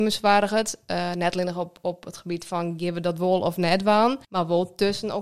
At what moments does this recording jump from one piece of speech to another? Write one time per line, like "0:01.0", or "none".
0:04.2